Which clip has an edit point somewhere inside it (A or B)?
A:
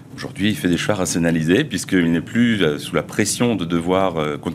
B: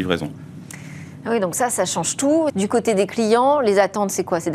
B